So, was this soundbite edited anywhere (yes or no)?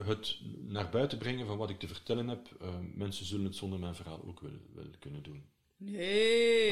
no